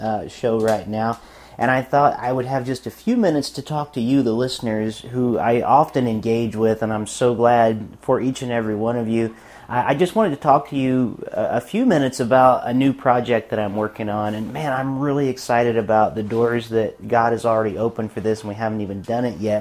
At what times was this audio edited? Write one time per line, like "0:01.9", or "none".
none